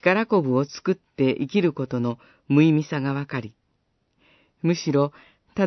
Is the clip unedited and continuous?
yes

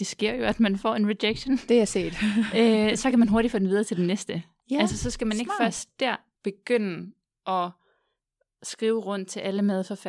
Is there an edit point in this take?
no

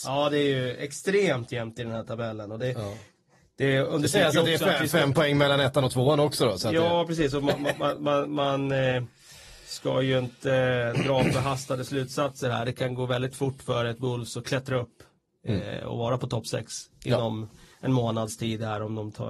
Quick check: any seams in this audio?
no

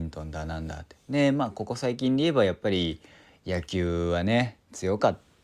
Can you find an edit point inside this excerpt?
no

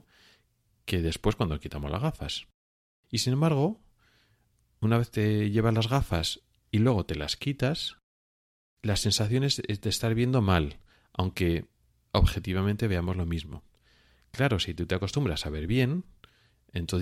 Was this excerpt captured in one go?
yes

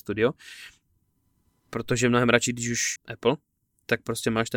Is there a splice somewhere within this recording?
yes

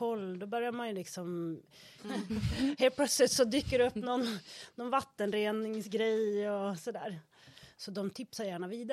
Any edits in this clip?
yes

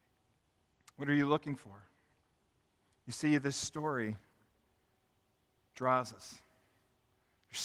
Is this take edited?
yes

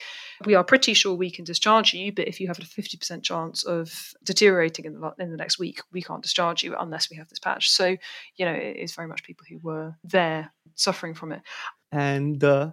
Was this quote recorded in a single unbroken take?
no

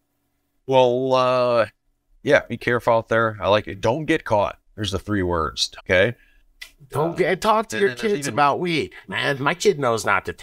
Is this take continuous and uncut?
no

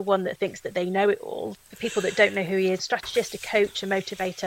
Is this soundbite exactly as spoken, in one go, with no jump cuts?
no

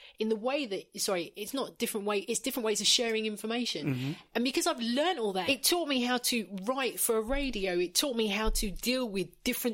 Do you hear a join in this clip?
yes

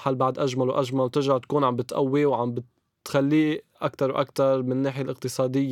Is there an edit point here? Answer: yes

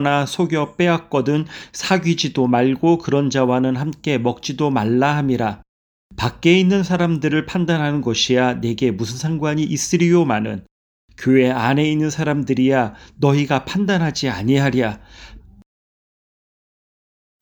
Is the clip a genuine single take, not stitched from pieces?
no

